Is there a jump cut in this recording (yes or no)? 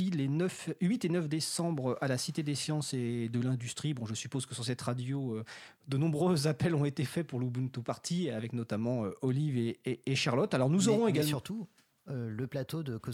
no